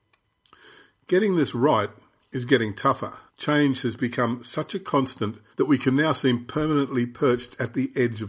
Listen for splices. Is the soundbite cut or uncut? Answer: cut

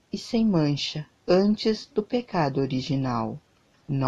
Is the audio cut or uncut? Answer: cut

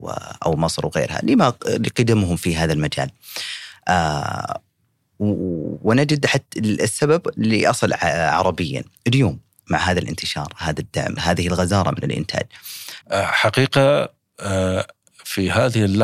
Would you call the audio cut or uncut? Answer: cut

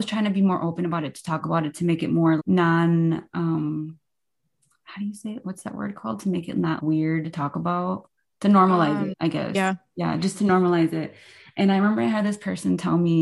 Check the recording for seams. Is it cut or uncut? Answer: cut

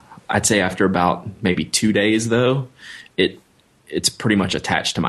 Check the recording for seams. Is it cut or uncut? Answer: uncut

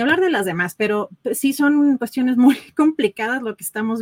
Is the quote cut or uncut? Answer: uncut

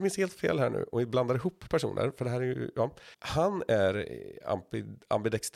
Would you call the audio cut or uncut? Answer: cut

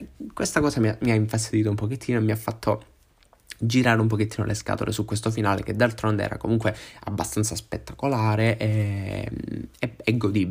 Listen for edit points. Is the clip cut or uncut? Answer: uncut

